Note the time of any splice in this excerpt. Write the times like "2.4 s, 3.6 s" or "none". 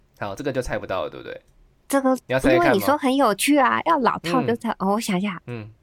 none